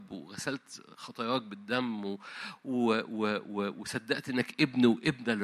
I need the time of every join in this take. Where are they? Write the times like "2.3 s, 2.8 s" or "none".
none